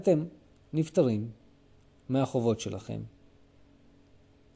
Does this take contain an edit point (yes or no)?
no